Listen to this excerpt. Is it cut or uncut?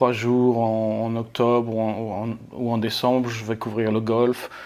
uncut